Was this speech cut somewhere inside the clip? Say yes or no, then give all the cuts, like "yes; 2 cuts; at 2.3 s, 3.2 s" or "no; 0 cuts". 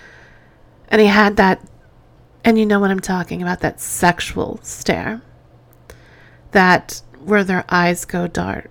no; 0 cuts